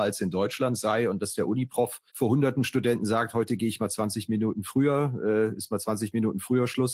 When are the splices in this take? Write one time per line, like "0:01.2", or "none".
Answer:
0:02.1